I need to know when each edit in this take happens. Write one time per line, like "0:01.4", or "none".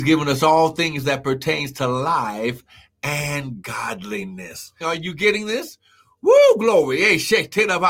0:04.8